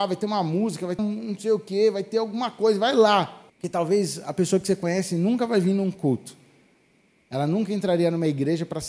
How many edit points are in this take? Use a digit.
2